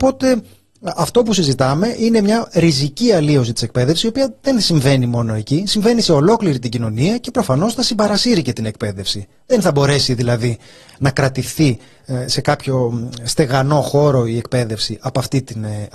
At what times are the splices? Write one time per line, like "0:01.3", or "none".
0:10.9